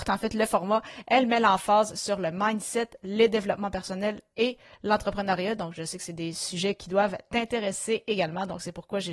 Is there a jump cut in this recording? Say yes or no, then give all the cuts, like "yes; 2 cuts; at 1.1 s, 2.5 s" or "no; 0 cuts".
no; 0 cuts